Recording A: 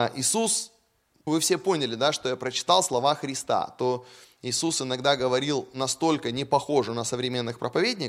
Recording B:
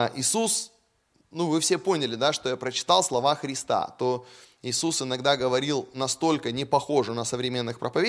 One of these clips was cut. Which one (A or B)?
A